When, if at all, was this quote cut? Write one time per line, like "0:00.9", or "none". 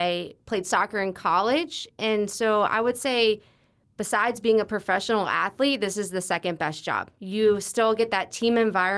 none